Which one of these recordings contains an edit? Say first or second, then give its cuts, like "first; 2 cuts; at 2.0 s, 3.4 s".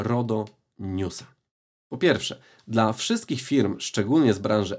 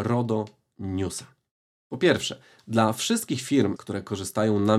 second; 1 cut; at 3.8 s